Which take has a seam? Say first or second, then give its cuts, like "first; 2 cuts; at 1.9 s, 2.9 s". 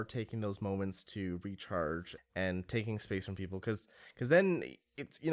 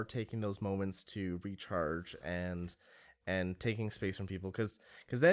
first; 1 cut; at 2.2 s